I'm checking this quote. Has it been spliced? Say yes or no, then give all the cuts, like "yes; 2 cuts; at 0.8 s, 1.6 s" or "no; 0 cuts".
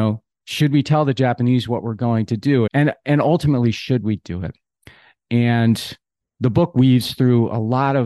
yes; 1 cut; at 2.7 s